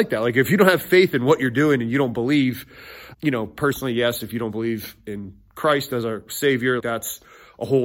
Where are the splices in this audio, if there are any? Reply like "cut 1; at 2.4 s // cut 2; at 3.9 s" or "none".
cut 1; at 3.1 s // cut 2; at 6.8 s